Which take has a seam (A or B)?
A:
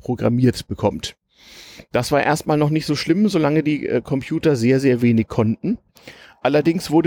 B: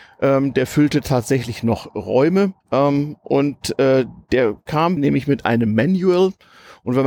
B